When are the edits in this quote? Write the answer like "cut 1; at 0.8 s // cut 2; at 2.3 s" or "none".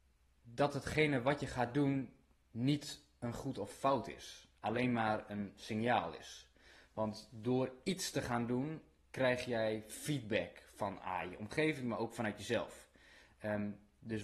none